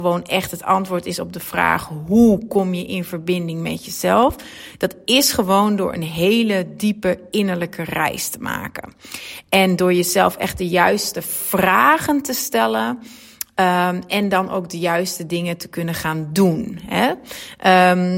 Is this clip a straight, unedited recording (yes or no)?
yes